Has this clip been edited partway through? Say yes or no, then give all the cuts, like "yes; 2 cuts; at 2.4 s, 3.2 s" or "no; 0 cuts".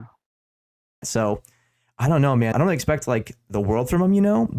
yes; 2 cuts; at 1.0 s, 2.5 s